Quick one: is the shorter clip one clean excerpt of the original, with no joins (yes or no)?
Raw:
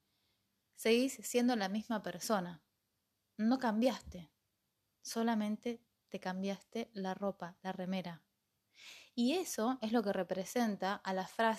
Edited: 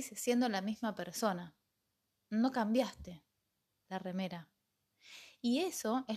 no